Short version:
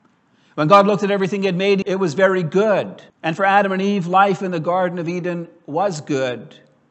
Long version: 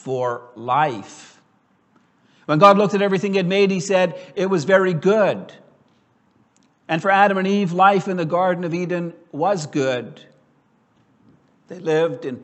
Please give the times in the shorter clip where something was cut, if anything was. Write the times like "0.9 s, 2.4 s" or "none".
1.8 s, 3.1 s